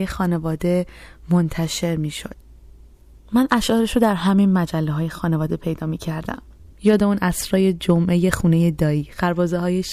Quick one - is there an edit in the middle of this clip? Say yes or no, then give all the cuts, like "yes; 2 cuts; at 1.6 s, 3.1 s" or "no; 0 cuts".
no; 0 cuts